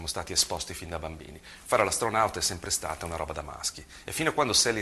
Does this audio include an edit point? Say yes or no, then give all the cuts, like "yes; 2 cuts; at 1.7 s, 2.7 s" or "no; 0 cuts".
no; 0 cuts